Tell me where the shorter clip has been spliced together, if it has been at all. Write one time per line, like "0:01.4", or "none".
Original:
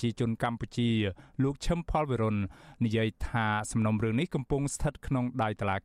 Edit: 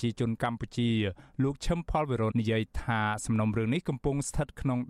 0:02.3